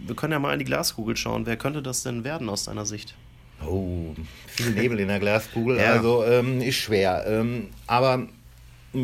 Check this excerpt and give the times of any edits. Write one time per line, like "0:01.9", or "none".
none